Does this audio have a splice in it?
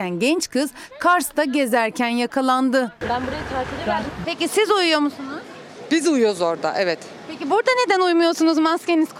yes; 1 cut; at 4.2 s

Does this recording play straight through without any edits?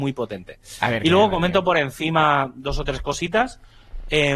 yes; 0 cuts

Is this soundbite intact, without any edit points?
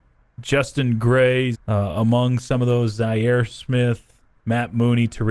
no; 1 cut; at 1.5 s

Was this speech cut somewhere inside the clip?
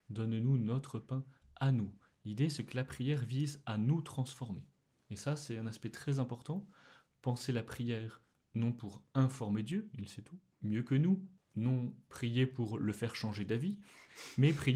no; 0 cuts

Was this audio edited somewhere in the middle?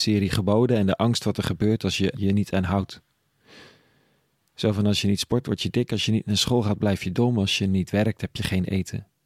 yes; 1 cut; at 2.1 s

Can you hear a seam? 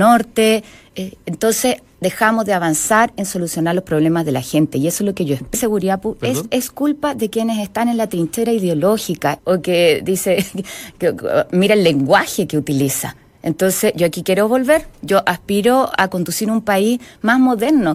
yes; 2 cuts; at 5.5 s, 9.4 s

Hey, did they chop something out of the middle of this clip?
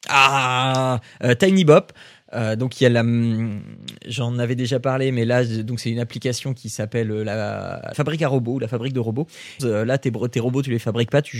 yes; 2 cuts; at 7.9 s, 9.6 s

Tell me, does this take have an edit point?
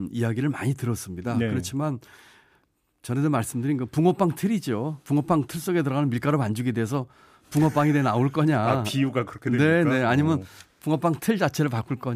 no; 0 cuts

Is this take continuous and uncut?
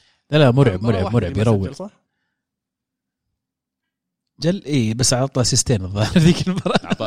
no; 1 cut; at 4.4 s

